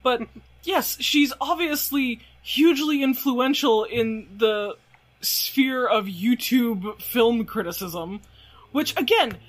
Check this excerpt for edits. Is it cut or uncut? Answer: uncut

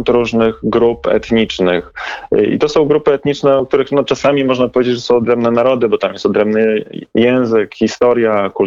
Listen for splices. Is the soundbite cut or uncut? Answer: uncut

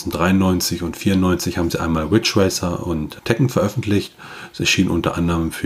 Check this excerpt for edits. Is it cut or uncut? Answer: cut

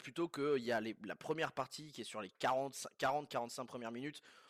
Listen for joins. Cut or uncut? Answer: uncut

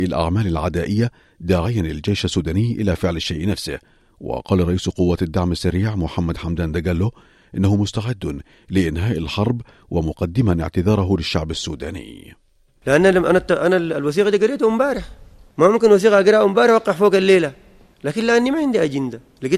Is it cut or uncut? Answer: uncut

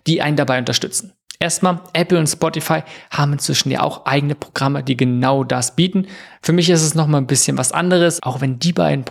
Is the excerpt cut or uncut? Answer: uncut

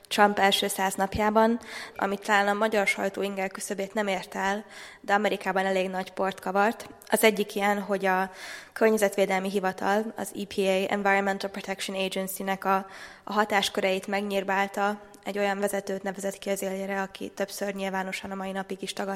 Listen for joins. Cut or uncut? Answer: cut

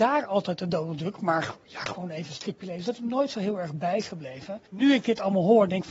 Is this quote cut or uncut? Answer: cut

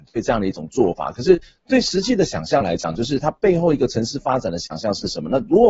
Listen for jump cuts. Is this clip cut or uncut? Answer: uncut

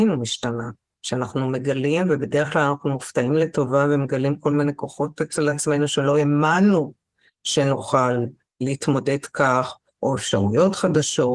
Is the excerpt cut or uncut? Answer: uncut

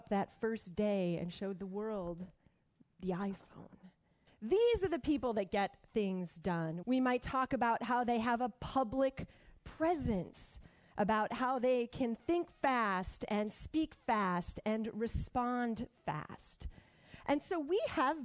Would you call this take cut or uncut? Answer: cut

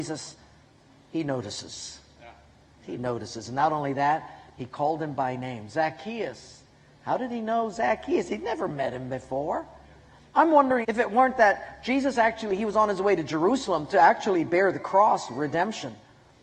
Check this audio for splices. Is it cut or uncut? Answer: cut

